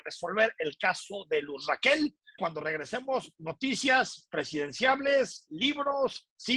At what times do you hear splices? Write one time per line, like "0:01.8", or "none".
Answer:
0:02.4